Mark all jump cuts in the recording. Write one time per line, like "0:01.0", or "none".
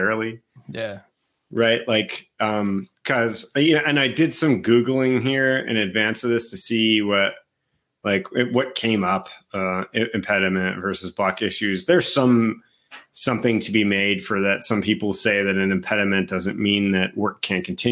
none

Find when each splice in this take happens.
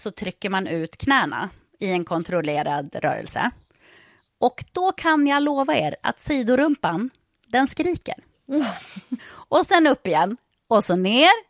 0:09.2

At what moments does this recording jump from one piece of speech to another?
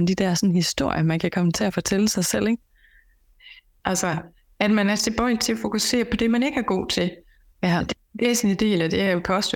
0:03.8
0:07.5

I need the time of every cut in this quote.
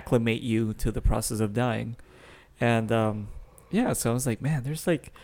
none

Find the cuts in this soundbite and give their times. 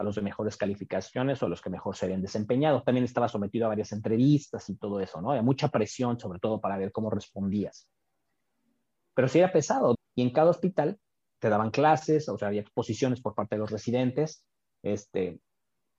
0:09.9
0:11.4

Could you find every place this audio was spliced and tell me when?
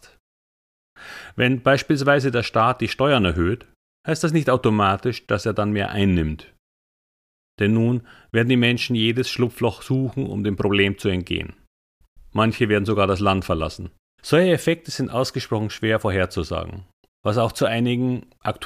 0:14.2
0:17.1

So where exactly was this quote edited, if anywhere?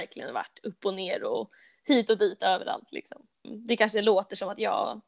0:03.4

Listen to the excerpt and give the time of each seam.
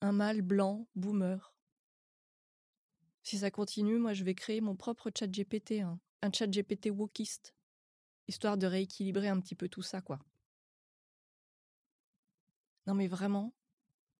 0:06.1

